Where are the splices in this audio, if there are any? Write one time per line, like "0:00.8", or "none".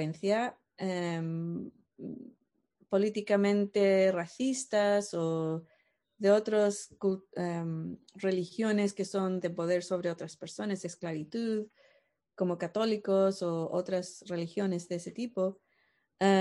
none